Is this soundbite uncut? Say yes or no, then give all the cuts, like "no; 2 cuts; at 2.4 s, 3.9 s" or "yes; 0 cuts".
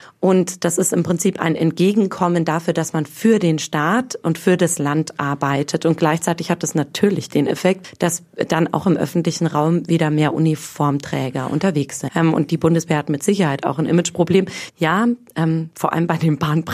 no; 3 cuts; at 12.1 s, 14.7 s, 15.7 s